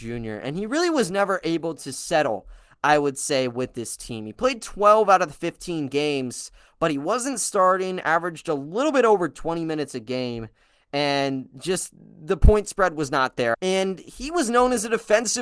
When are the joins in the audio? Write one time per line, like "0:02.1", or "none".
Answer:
0:13.5